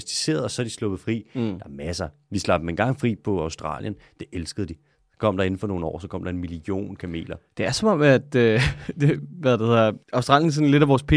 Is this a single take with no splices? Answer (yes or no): no